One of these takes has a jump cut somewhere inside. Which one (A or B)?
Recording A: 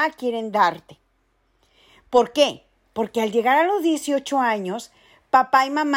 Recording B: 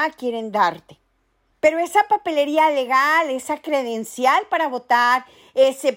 B